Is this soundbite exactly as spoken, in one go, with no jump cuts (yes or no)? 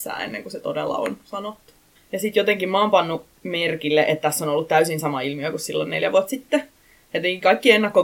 no